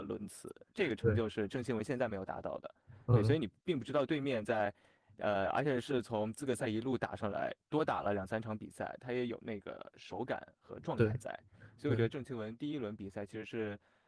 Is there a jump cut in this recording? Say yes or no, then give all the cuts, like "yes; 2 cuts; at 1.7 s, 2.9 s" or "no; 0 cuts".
no; 0 cuts